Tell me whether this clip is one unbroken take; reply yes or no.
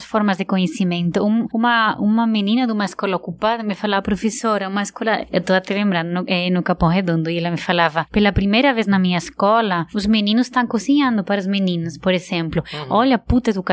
yes